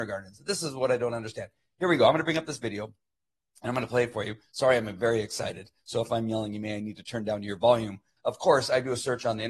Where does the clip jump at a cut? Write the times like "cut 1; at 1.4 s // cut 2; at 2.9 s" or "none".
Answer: cut 1; at 8.2 s